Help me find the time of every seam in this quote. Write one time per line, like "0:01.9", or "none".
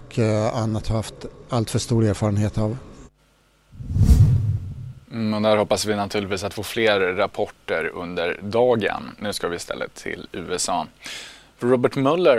0:05.0